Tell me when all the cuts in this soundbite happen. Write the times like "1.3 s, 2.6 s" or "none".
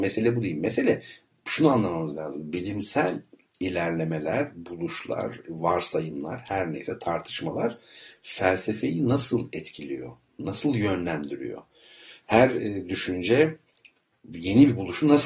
none